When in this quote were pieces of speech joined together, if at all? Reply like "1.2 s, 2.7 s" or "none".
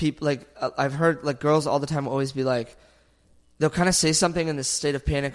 none